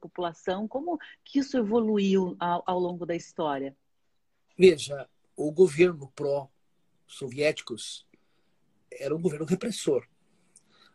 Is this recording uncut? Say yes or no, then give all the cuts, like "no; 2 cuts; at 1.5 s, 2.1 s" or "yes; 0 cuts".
yes; 0 cuts